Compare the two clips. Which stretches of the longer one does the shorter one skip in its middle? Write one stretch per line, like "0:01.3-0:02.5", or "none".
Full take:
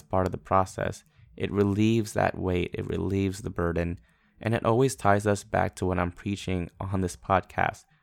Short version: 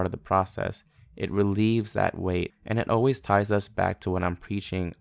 0:02.7-0:04.3